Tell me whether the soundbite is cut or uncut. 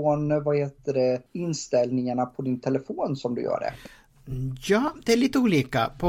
cut